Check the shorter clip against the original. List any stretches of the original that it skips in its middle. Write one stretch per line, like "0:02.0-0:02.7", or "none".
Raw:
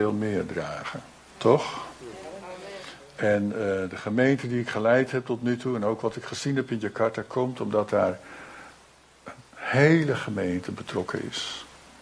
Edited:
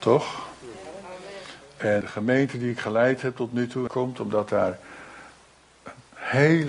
0:03.4-0:03.9
0:05.8-0:07.3